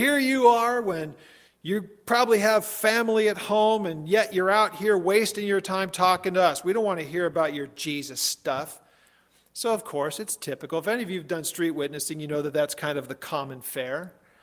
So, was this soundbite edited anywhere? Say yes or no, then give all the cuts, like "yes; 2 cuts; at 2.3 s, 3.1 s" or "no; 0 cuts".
no; 0 cuts